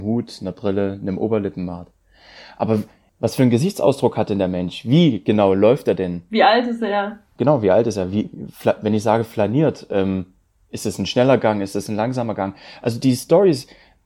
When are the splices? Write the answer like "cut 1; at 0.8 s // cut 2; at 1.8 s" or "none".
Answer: none